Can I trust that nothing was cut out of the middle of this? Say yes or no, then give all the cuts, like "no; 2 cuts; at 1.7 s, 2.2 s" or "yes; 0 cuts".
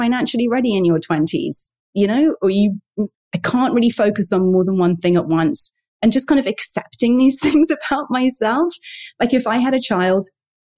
no; 1 cut; at 3.1 s